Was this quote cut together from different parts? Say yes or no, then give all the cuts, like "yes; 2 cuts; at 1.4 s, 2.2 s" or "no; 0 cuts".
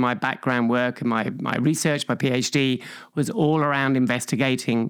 no; 0 cuts